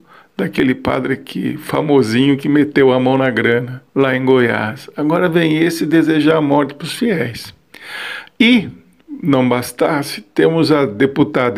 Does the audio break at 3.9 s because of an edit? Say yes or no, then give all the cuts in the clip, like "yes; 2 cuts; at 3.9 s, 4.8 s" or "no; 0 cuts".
yes; 1 cut; at 3.9 s